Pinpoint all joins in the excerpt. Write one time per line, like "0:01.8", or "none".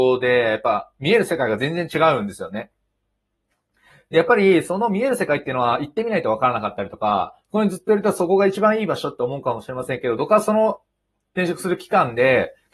0:10.2